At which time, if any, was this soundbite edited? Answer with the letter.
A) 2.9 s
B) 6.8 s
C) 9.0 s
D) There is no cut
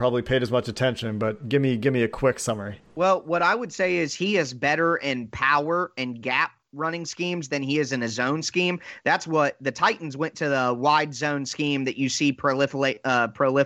A